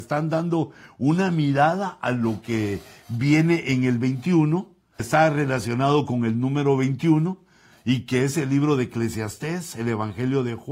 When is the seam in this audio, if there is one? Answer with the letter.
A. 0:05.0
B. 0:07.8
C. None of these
A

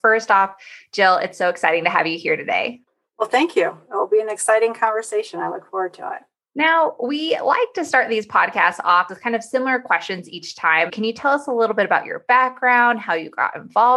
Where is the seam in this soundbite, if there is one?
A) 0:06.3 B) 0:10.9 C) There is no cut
B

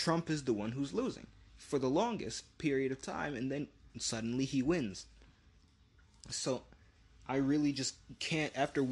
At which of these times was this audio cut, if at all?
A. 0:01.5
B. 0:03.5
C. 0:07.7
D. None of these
A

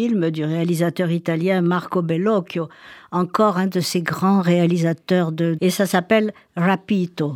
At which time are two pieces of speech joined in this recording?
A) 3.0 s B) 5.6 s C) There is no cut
B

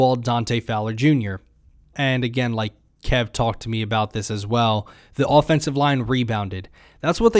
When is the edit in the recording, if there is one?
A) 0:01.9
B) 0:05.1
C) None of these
A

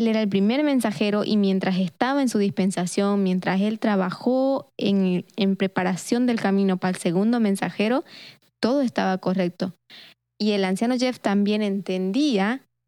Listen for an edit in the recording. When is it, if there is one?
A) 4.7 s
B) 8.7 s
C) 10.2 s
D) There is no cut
D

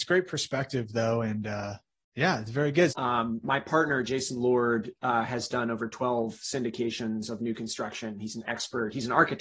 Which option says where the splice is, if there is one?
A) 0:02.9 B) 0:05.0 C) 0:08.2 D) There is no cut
A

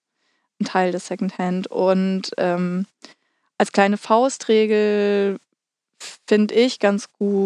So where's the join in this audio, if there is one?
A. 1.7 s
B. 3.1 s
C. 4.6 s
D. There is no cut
D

